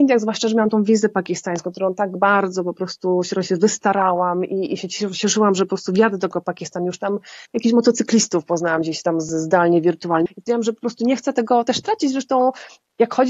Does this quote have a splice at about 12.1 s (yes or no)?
no